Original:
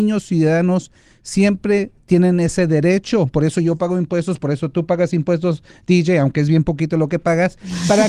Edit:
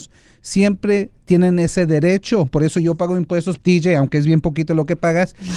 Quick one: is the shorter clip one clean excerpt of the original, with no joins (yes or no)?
no